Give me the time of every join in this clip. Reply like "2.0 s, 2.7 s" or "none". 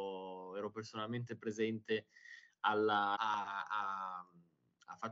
3.1 s

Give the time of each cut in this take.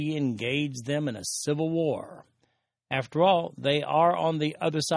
none

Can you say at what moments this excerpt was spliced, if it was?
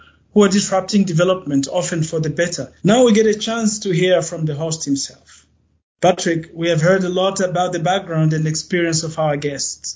2.8 s

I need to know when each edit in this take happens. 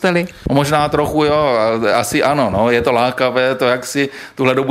none

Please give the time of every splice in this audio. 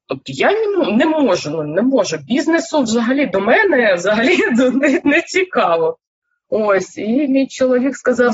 none

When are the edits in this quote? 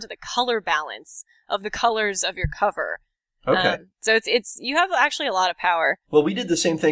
6.0 s

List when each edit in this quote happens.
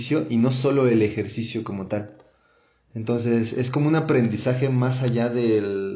none

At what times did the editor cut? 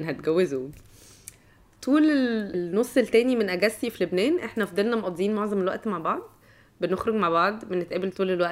none

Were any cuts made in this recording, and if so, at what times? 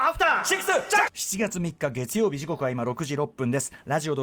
1.1 s

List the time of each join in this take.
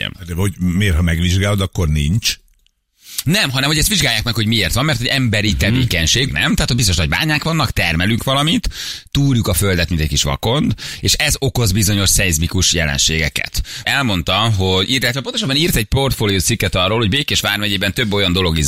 6.3 s, 13.8 s

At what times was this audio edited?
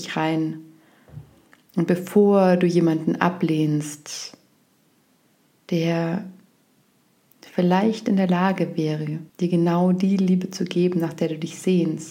9.3 s

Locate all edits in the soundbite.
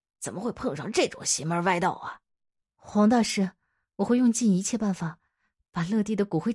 2.6 s

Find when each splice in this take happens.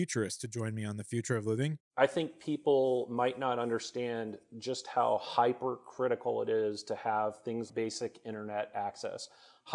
1.8 s, 7.7 s

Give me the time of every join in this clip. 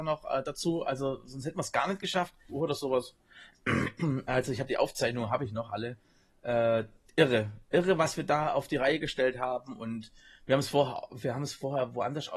2.5 s

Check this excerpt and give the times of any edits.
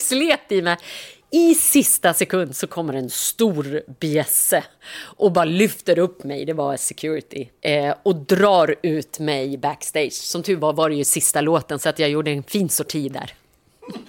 7.6 s

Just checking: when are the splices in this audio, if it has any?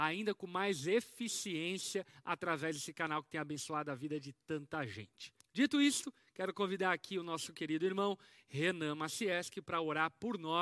5.4 s

